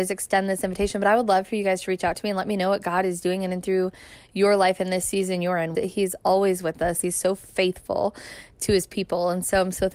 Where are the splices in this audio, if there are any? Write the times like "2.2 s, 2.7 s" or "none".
5.7 s, 7.0 s